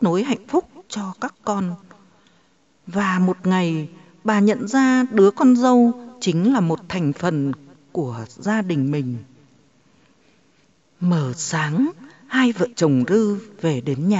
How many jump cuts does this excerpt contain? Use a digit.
1